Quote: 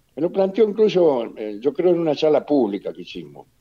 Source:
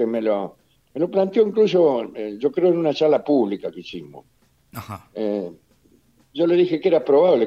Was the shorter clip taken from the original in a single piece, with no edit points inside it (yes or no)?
yes